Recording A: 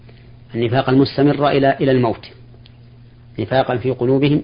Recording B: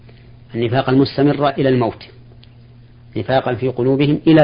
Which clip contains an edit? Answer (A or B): B